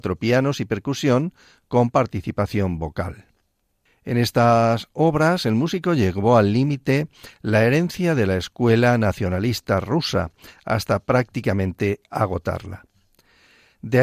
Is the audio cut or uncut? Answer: uncut